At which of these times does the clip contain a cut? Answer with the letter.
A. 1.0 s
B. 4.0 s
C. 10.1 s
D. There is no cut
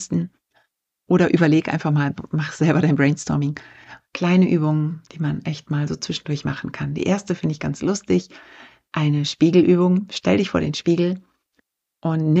B